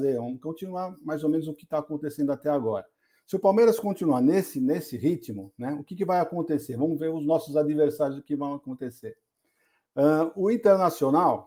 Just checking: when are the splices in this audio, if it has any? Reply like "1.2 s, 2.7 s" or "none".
none